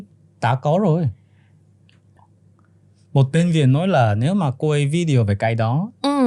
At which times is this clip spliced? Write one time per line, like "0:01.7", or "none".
0:02.2